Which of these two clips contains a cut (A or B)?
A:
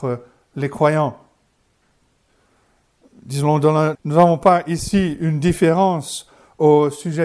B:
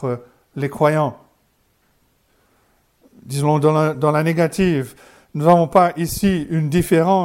A